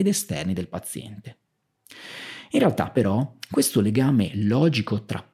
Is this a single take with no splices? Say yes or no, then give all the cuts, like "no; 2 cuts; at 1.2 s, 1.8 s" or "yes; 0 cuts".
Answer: yes; 0 cuts